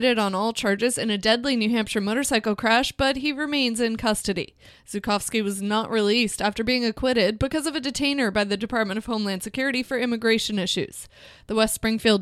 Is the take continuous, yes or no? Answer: yes